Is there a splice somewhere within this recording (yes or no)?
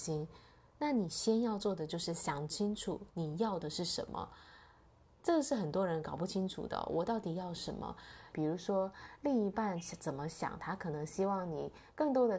yes